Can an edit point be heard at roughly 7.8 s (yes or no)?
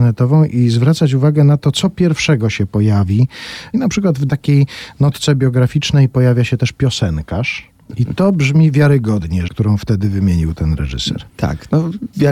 yes